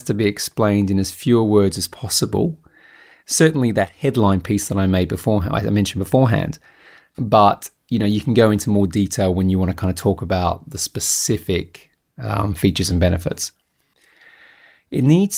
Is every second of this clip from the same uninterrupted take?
yes; 0 cuts

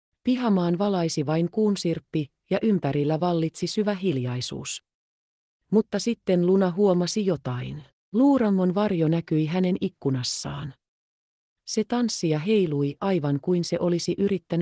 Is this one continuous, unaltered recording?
yes; 0 cuts

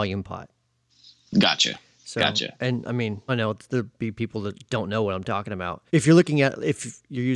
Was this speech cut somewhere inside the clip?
yes; 2 cuts; at 3.3 s, 5.9 s

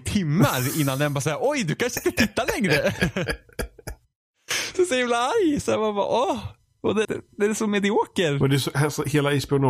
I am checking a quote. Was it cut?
yes; 1 cut; at 7.0 s

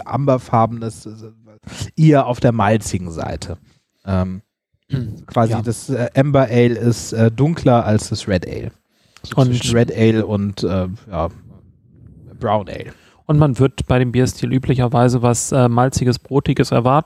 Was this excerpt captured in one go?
yes; 0 cuts

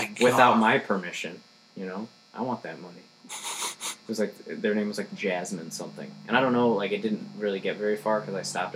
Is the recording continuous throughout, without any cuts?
yes; 0 cuts

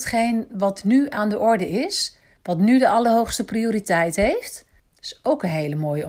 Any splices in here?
yes; 1 cut; at 4.8 s

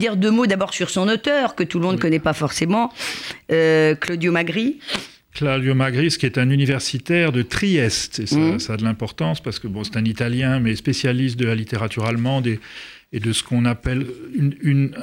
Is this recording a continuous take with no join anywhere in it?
yes; 0 cuts

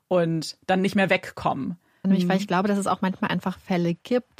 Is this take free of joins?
no; 1 cut; at 2.0 s

